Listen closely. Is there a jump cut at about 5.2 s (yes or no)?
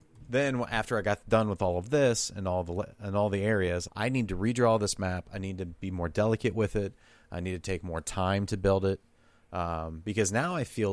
no